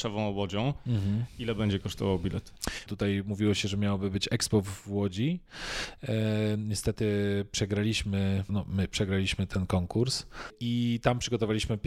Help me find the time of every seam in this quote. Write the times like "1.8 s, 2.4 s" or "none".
2.9 s, 8.5 s